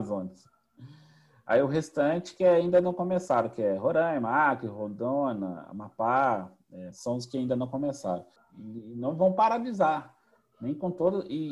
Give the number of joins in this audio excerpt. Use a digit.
2